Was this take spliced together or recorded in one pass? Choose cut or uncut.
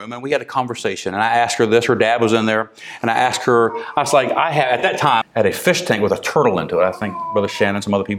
cut